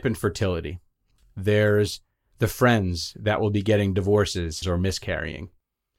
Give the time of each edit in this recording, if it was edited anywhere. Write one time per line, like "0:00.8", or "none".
0:04.6